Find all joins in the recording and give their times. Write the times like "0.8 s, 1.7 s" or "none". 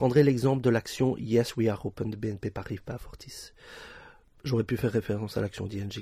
none